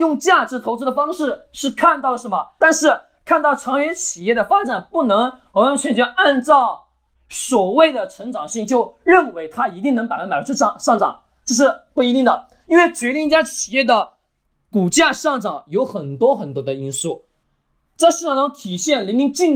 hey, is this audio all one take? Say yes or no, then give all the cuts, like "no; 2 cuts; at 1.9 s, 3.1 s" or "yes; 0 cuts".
no; 1 cut; at 2.6 s